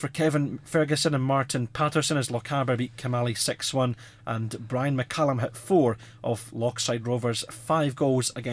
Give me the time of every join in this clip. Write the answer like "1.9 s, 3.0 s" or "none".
none